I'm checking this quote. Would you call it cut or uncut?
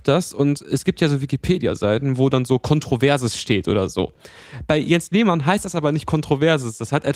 uncut